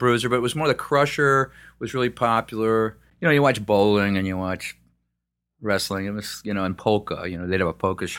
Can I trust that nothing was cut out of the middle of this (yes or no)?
yes